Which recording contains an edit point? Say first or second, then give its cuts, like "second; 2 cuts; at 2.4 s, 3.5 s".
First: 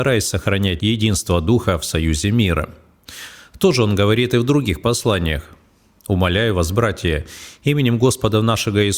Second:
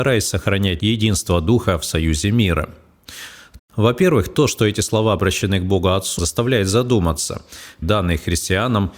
second; 3 cuts; at 3.6 s, 6.2 s, 7.8 s